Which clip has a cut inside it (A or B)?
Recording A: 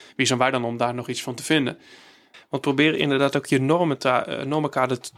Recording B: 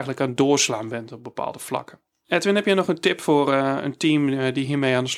A